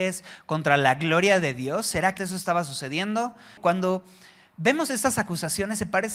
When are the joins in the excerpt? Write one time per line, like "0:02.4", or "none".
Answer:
0:02.2
0:03.6

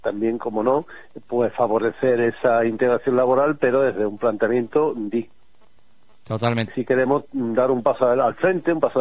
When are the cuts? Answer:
0:06.7

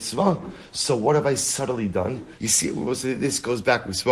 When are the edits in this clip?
0:02.4

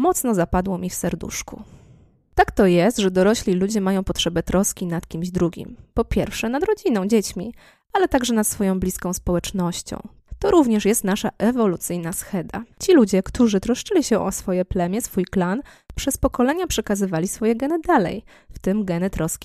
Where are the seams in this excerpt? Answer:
0:12.7

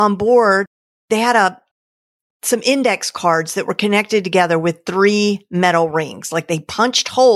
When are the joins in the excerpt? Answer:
none

